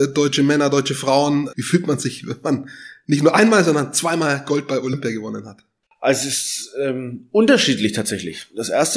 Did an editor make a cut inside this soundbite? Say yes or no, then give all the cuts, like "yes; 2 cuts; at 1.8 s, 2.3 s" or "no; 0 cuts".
yes; 1 cut; at 1.5 s